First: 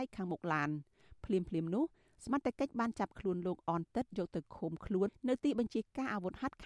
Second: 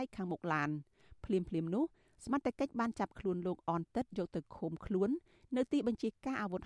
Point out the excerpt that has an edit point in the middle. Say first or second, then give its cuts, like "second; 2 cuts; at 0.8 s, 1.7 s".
first; 1 cut; at 5.1 s